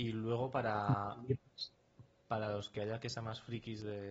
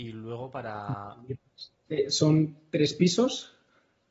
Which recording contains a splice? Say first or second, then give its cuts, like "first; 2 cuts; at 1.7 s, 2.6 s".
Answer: second; 1 cut; at 1.9 s